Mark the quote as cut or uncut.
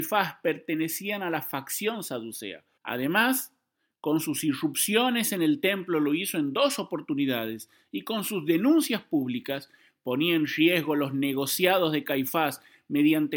cut